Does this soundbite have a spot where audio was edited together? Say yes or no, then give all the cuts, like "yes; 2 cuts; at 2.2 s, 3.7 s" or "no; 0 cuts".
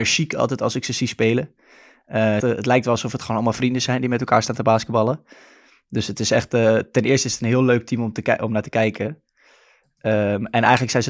yes; 1 cut; at 2.4 s